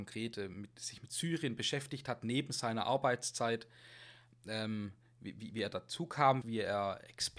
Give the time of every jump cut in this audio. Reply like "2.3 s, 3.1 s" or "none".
6.4 s